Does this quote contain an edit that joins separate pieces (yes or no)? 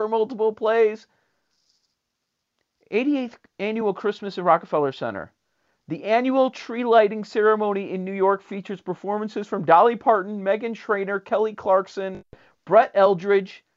no